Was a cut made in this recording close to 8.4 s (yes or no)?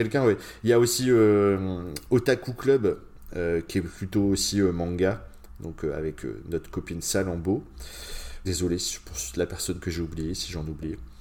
yes